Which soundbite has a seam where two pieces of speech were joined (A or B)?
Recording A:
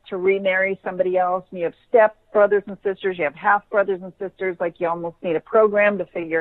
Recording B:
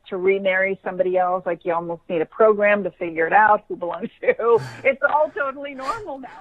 B